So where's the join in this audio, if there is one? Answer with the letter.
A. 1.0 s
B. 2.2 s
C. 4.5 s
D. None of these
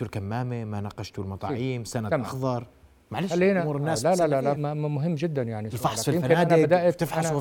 C